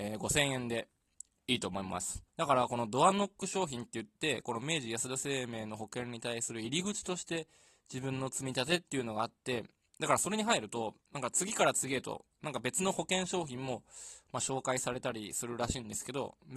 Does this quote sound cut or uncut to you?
cut